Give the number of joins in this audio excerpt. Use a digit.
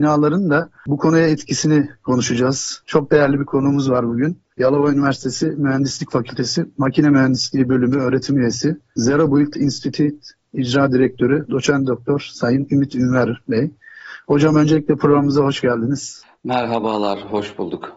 0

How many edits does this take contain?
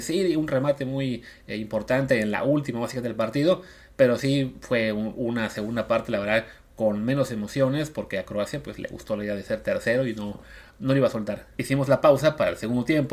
1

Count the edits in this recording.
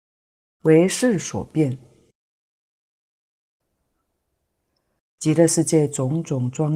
1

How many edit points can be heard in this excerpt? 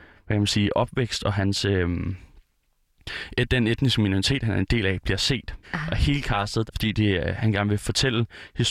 2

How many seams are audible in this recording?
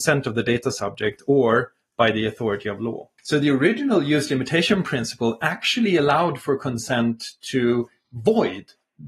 1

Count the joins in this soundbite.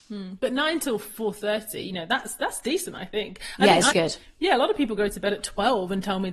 1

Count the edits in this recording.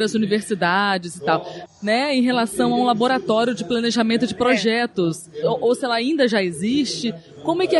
2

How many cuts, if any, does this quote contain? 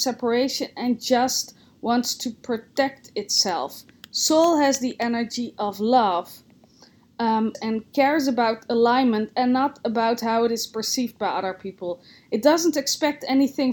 1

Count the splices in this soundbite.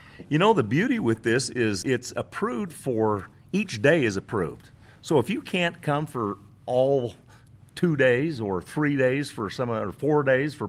1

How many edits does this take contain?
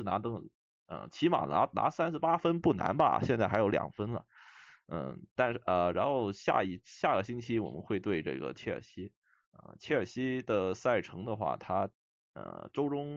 0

